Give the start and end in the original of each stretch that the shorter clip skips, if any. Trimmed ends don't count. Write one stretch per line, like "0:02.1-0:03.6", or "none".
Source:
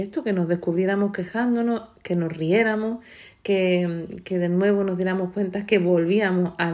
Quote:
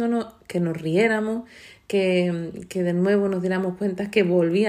none